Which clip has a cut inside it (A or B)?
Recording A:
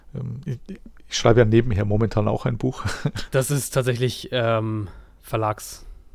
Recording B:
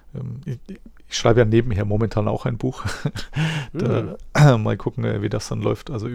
A